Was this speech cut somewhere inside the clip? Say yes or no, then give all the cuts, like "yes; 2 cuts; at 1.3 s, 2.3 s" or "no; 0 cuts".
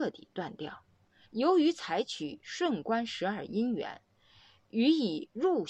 yes; 1 cut; at 1.2 s